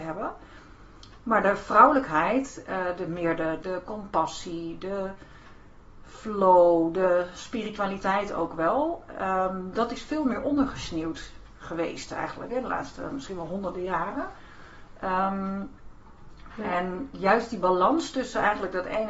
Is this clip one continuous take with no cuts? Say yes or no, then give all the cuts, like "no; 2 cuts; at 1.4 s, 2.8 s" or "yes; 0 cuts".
no; 2 cuts; at 3.6 s, 16.5 s